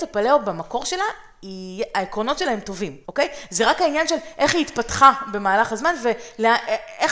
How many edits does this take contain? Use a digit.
1